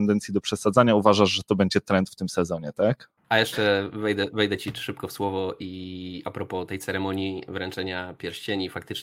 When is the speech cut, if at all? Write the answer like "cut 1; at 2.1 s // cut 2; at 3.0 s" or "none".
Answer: cut 1; at 3.2 s